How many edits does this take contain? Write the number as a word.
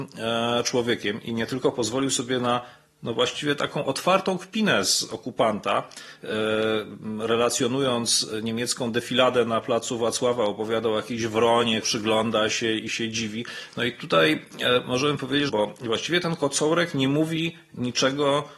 two